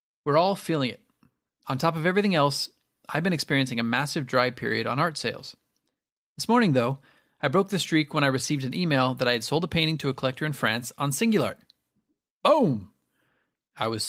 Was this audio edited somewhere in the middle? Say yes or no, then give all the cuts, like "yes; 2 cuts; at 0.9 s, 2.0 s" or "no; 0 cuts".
no; 0 cuts